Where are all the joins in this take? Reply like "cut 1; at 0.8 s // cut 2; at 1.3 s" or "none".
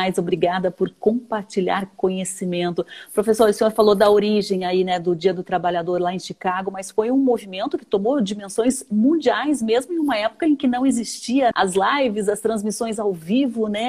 cut 1; at 11.5 s